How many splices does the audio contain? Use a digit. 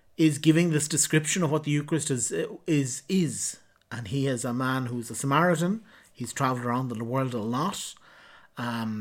0